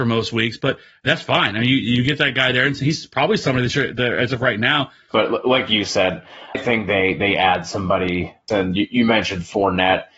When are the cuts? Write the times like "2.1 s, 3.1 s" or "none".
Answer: 5.1 s, 6.5 s, 8.5 s

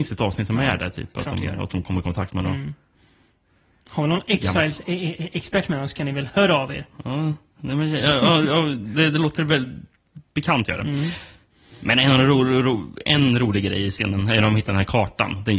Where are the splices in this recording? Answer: none

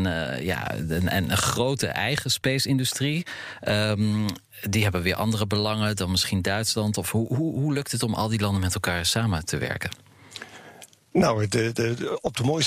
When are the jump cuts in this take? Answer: none

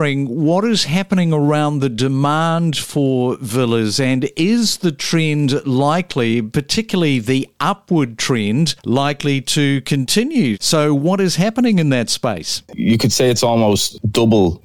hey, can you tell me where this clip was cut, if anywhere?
12.7 s

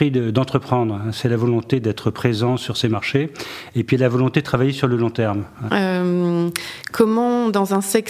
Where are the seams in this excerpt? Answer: 5.7 s

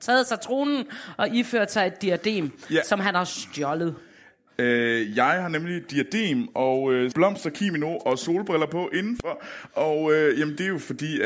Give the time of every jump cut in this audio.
7.1 s

